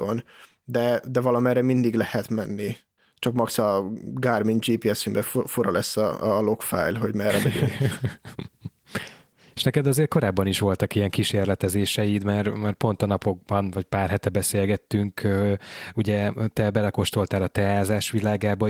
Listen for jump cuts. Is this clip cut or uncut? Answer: uncut